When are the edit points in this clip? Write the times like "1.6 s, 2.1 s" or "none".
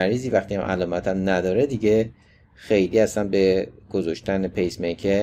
none